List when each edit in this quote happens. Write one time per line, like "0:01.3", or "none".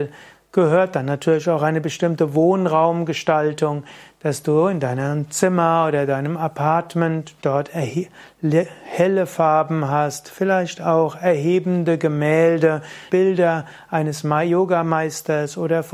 0:07.4
0:13.1